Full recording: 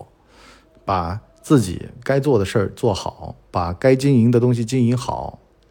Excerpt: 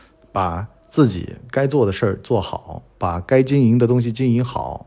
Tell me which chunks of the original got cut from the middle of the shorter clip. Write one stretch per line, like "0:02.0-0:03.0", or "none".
none